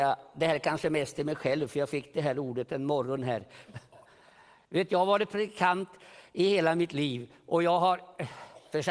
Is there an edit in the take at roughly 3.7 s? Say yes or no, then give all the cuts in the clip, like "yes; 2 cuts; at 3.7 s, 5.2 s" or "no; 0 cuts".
yes; 1 cut; at 3.7 s